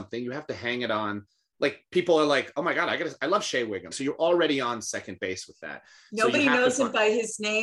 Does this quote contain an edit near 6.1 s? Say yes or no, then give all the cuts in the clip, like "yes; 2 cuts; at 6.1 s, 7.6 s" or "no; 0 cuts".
no; 1 cut; at 3.9 s